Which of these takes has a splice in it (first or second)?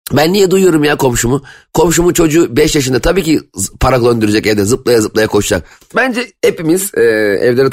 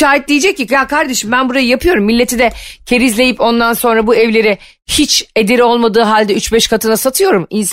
first